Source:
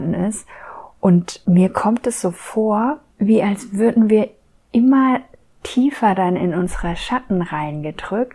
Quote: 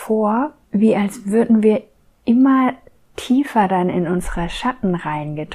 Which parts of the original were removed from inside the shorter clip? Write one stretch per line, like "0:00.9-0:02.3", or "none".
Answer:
none